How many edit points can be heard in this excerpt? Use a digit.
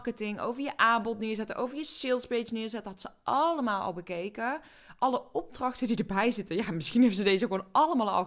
0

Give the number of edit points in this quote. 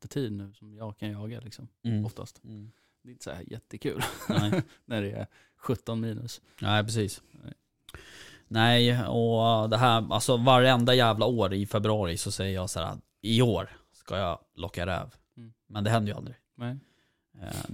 0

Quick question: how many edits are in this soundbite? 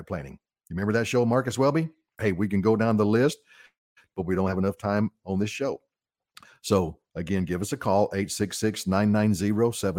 1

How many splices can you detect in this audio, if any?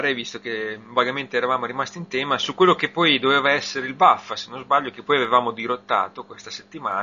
0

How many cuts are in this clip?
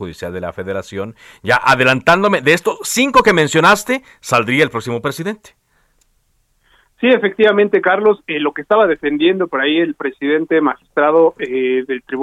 0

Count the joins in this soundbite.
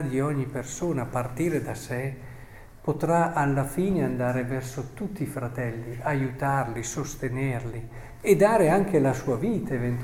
0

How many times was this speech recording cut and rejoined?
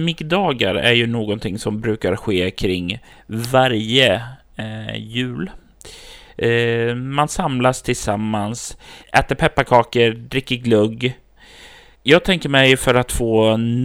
2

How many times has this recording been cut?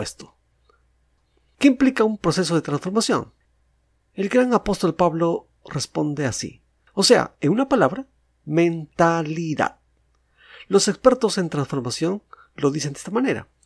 1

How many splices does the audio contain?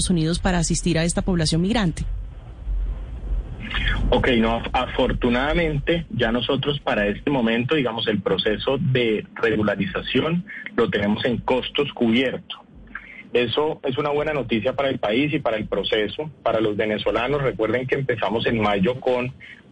0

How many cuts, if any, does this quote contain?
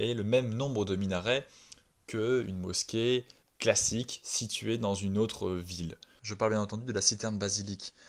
2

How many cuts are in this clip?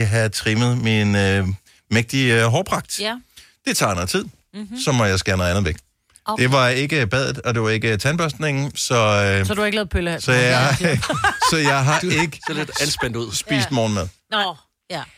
0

